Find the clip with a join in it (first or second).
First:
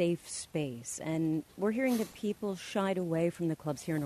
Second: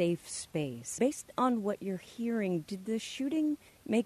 second